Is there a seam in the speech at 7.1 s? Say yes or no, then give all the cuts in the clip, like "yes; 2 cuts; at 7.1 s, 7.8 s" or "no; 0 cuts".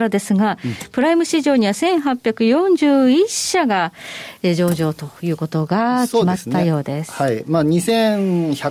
no; 0 cuts